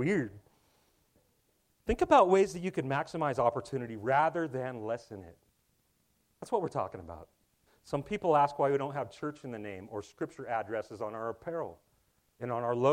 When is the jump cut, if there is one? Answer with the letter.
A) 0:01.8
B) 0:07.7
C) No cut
B